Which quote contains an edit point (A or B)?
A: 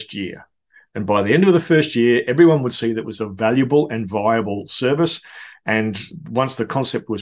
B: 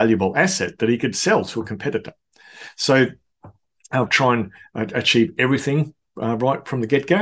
B